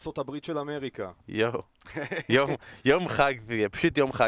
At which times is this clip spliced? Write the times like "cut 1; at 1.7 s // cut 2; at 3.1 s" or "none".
cut 1; at 1.2 s